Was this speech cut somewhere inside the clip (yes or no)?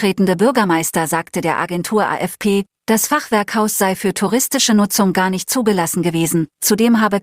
no